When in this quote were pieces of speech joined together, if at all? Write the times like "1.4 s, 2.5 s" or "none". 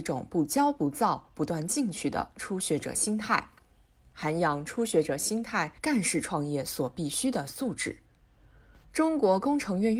5.8 s